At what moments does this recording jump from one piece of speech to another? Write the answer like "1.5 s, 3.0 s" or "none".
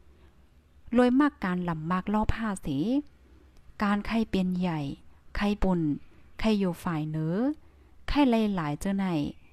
5.6 s

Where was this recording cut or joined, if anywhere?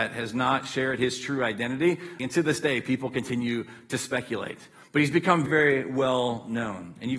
2.2 s, 5.5 s

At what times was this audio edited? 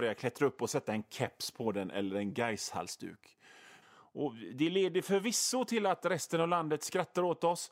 3.8 s

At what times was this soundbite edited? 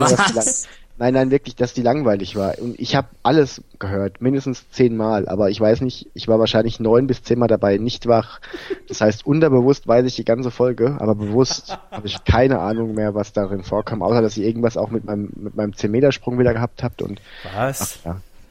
none

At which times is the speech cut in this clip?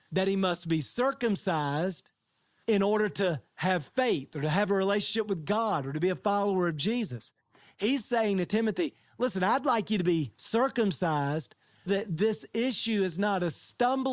11.9 s

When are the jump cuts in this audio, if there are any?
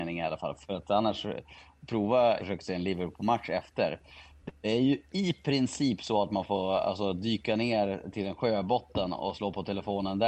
2.4 s

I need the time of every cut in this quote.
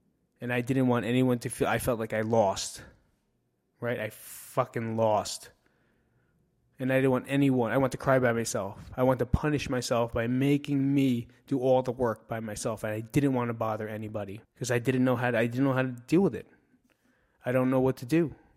14.4 s

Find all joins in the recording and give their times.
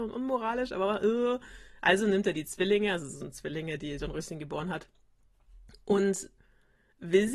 none

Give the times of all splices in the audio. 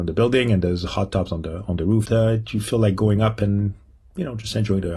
2.0 s

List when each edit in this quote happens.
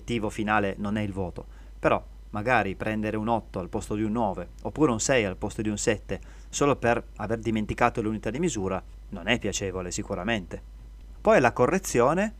11.2 s

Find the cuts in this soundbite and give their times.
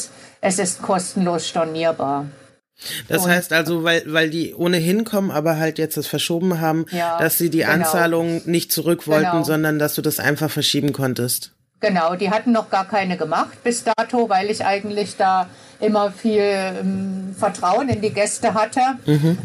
none

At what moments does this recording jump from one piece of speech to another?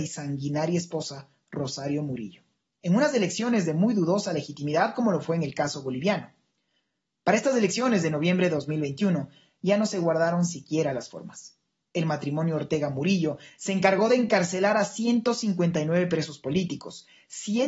none

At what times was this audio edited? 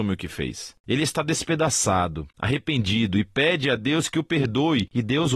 none

